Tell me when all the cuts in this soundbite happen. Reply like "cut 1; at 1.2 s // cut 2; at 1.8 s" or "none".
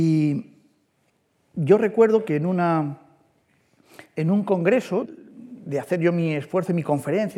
cut 1; at 5.0 s